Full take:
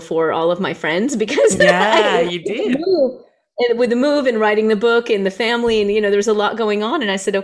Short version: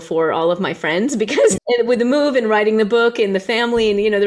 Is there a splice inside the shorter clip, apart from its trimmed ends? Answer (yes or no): yes